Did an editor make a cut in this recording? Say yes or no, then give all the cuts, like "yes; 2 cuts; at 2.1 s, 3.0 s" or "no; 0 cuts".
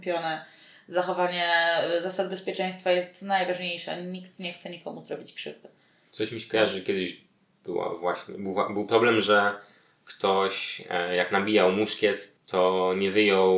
yes; 1 cut; at 12.4 s